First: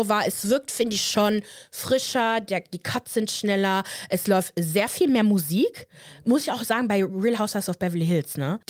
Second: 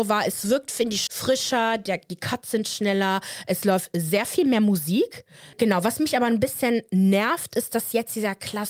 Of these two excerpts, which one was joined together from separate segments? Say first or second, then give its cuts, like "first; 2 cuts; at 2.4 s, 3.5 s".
second; 2 cuts; at 1.1 s, 5.5 s